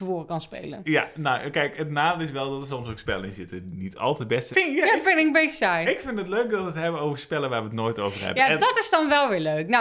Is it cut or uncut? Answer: cut